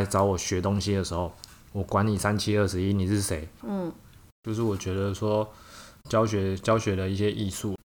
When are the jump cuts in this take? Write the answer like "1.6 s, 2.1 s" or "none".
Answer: 3.6 s